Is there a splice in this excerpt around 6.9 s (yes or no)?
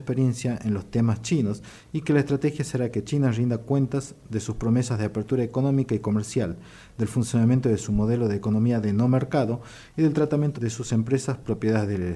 no